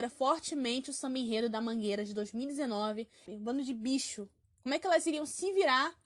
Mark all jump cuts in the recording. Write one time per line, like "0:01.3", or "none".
0:03.3
0:04.4